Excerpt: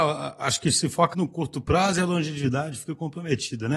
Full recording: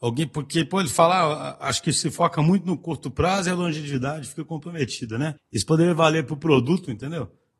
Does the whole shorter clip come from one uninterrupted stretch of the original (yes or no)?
no